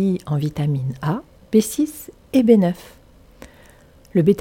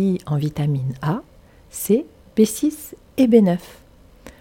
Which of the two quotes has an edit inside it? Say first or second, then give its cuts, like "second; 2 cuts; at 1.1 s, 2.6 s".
first; 1 cut; at 1.4 s